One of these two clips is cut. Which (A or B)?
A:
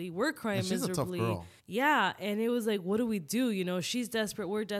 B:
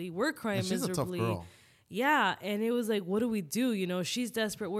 A